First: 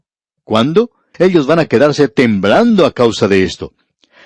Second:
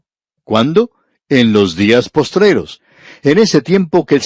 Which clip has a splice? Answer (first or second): first